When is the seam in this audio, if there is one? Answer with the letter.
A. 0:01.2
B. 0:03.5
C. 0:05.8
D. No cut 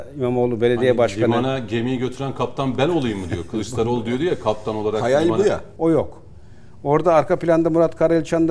C